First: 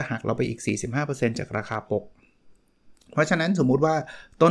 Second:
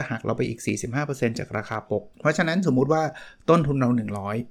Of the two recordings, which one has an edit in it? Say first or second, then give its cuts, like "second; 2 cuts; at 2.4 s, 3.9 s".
second; 1 cut; at 2.1 s